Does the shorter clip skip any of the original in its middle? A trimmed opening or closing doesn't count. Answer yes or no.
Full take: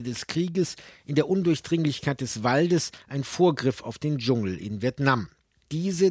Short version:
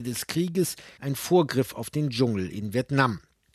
yes